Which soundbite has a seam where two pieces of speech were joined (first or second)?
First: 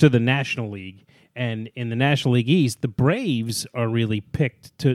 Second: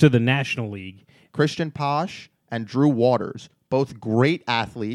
second